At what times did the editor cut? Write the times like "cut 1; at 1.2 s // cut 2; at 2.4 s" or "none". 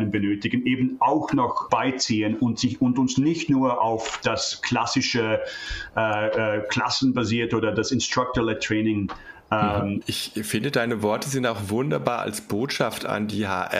cut 1; at 1.7 s // cut 2; at 10.0 s

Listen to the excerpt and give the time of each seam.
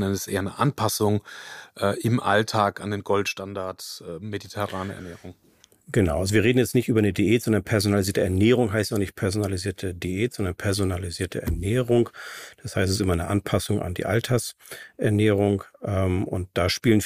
none

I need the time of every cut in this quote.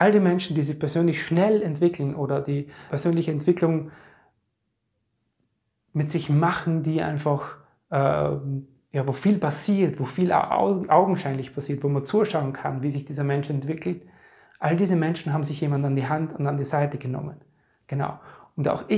cut 1; at 2.9 s

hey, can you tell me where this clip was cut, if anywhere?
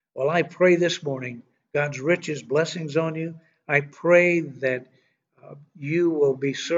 none

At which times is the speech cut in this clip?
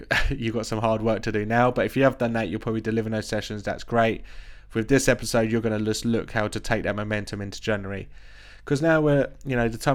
none

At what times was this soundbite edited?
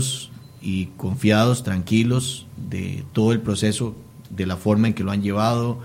none

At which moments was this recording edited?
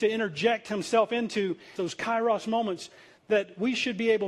cut 1; at 1.8 s

